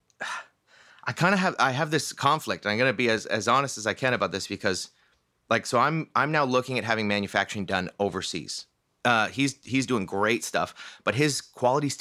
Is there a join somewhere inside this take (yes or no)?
yes